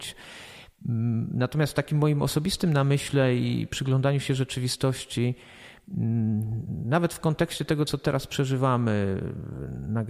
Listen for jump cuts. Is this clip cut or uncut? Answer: uncut